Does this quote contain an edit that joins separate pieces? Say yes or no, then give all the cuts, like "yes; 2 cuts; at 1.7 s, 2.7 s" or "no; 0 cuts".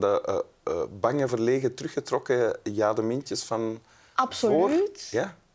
no; 0 cuts